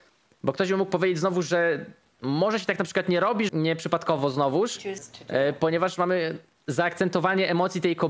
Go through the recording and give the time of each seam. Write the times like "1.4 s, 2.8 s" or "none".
3.5 s